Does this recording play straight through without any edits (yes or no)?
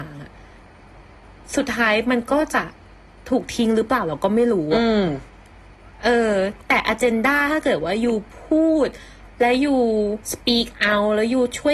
no